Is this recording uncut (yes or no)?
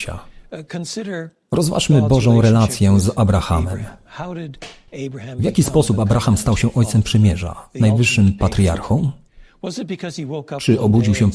yes